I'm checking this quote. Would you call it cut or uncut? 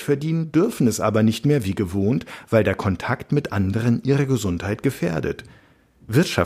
uncut